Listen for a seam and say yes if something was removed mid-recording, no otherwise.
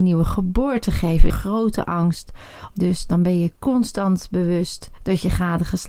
yes